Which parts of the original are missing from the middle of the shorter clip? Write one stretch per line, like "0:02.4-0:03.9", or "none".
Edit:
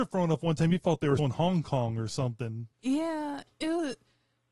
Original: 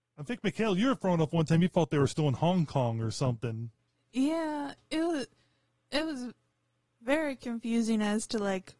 0:02.1-0:02.2
0:03.8-0:04.0